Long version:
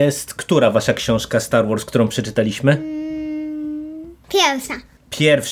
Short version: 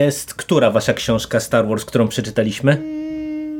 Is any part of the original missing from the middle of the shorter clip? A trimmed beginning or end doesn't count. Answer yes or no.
no